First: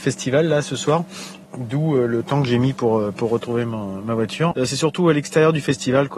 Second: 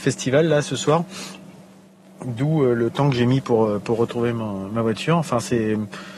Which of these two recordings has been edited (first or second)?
first